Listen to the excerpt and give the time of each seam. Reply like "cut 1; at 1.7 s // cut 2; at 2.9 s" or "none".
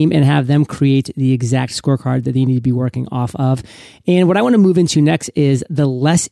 none